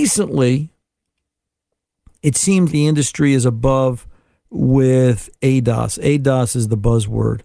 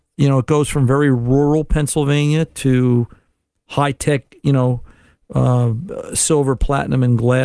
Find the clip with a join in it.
first; 1 cut; at 2.7 s

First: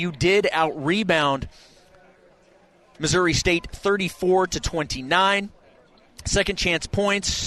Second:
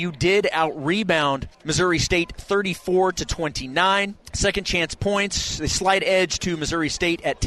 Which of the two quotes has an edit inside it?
second; 2 cuts; at 1.5 s, 4.2 s

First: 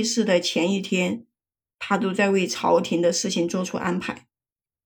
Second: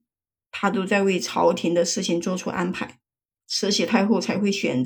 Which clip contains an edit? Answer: second; 1 cut; at 3.3 s

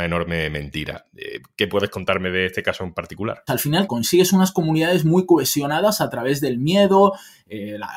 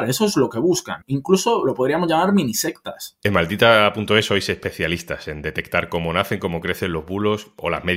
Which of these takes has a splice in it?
first; 1 cut; at 3.5 s

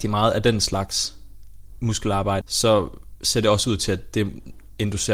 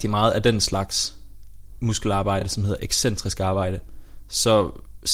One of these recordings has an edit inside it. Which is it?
first; 1 cut; at 2.4 s

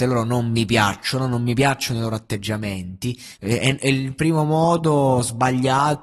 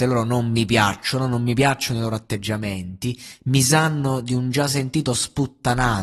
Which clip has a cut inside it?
first; 1 cut; at 3.4 s

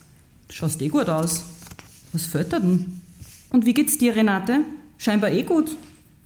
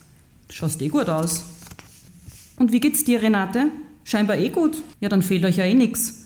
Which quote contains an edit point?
second; 2 cuts; at 2.1 s, 4.9 s

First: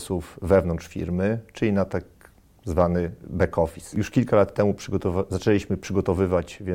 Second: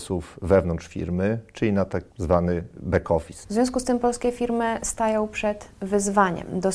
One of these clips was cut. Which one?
second; 2 cuts; at 2.1 s, 3.4 s

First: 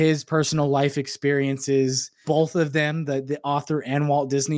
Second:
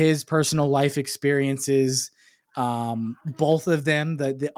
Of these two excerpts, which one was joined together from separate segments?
first; 1 cut; at 2.2 s

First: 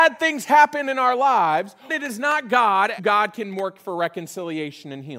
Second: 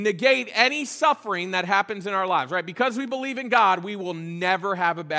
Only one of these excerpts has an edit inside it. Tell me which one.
first; 2 cuts; at 1.9 s, 3.0 s

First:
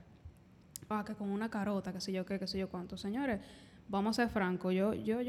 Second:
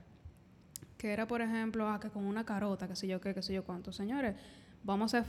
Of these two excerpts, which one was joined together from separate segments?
first; 1 cut; at 0.9 s

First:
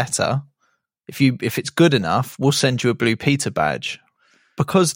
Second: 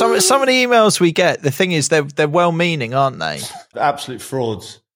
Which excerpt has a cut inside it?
second; 1 cut; at 3.7 s

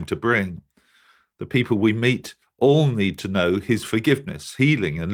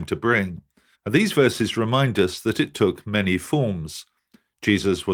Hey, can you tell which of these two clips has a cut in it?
second; 1 cut; at 0.9 s

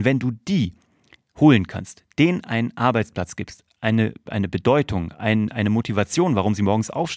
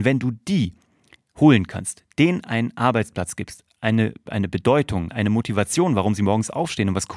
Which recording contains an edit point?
second; 1 cut; at 5.1 s

